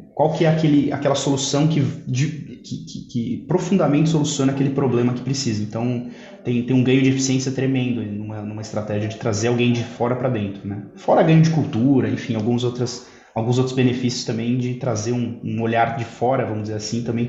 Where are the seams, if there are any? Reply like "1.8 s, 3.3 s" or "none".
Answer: none

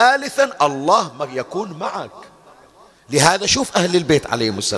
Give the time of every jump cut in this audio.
none

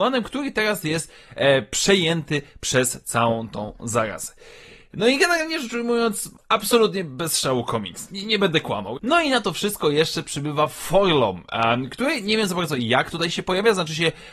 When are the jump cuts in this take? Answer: 6.4 s, 9.0 s

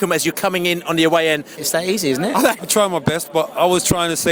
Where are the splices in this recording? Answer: 1.6 s, 2.6 s

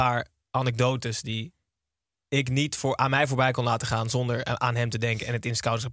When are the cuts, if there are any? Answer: none

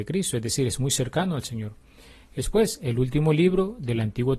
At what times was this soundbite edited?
none

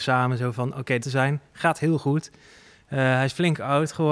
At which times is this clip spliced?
1.0 s

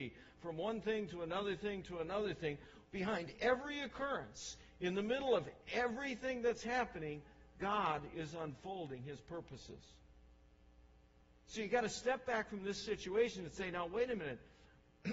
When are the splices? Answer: 2.9 s

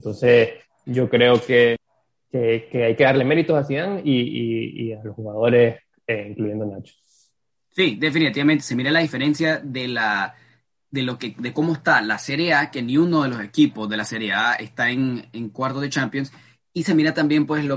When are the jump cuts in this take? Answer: none

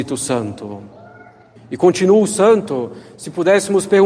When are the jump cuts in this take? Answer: 1.6 s

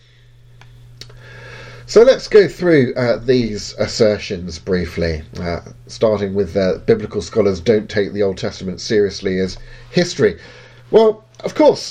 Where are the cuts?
none

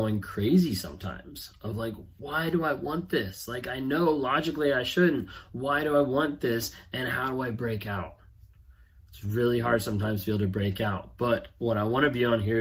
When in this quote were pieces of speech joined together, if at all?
none

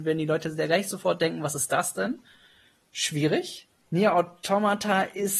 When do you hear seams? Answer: none

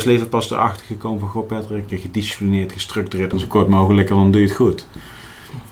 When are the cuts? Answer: 1.9 s, 3.3 s

